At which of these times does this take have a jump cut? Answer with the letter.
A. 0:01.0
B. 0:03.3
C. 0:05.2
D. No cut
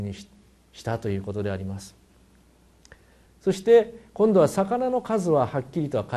B